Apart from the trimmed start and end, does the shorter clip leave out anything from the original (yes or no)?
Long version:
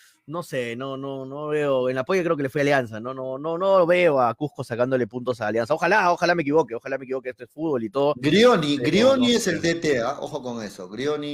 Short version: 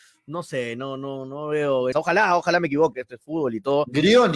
yes